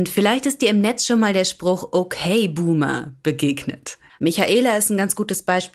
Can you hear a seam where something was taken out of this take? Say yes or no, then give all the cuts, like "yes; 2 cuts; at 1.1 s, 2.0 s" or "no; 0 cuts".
yes; 1 cut; at 4.1 s